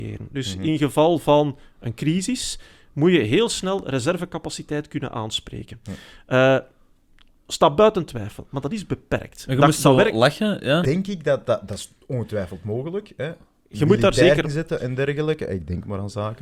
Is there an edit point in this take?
yes; 2 cuts; at 10.8 s, 14.4 s

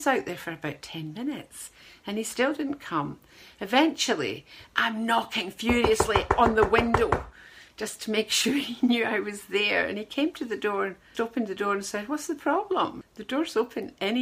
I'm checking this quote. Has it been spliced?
yes; 2 cuts; at 11.1 s, 13.0 s

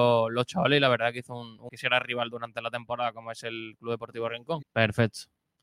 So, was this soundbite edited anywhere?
yes; 2 cuts; at 1.7 s, 4.6 s

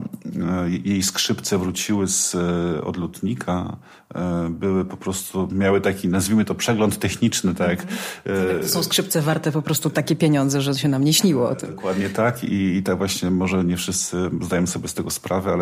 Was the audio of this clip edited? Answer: no; 0 cuts

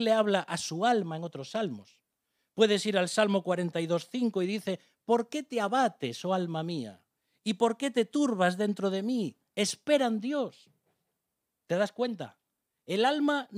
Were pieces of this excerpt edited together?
no; 0 cuts

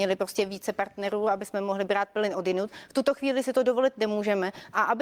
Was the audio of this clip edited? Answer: no; 0 cuts

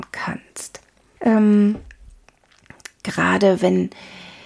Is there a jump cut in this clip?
yes; 1 cut; at 1.2 s

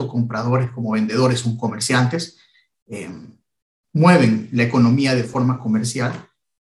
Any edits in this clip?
no; 0 cuts

